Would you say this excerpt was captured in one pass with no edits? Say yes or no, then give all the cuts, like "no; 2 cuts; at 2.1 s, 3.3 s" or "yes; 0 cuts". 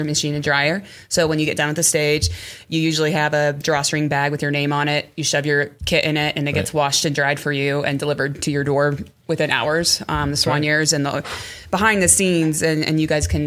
no; 1 cut; at 5.8 s